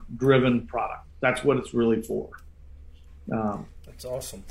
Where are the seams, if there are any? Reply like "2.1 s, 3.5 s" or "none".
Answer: none